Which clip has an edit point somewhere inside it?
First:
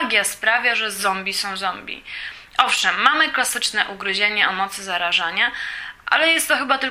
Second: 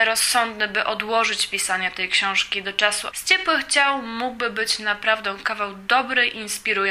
second; 1 cut; at 3.1 s

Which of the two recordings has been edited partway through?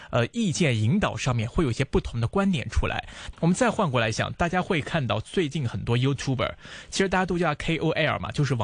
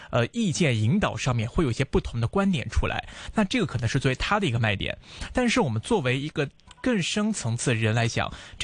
first; 1 cut; at 3.3 s

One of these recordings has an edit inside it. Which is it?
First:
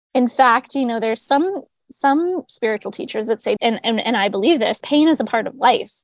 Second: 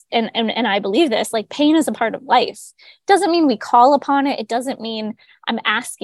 first; 2 cuts; at 3.6 s, 4.8 s

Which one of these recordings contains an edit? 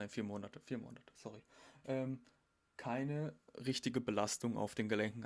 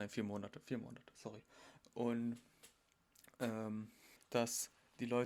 second; 2 cuts; at 1.8 s, 4.2 s

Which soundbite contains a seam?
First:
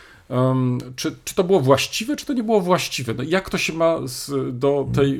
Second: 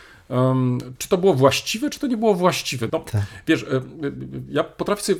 second; 2 cuts; at 1.0 s, 2.9 s

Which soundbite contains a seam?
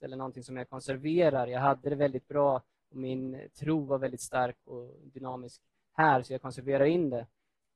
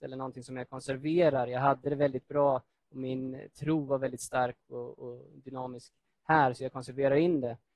first; 1 cut; at 4.6 s

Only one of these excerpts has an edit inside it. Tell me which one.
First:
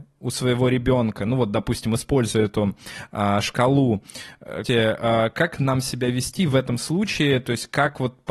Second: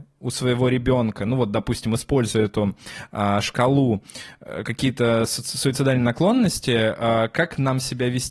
first; 1 cut; at 4.6 s

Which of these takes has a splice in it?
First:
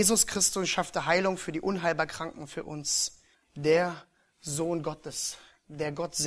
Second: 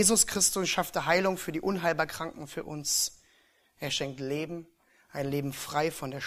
first; 1 cut; at 3.3 s

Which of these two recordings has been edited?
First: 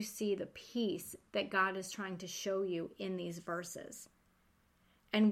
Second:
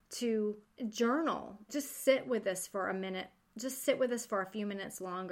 second; 1 cut; at 1.7 s

